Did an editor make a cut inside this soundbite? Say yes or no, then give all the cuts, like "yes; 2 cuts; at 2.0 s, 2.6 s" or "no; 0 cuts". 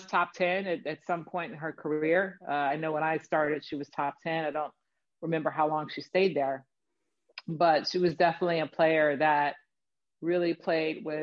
no; 0 cuts